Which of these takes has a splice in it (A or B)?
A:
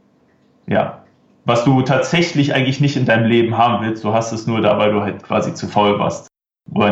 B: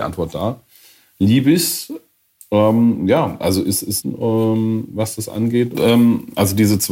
B